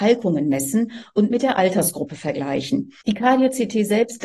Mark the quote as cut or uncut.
cut